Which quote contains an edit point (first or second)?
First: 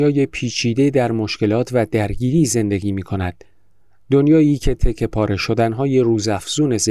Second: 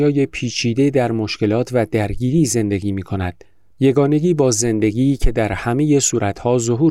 second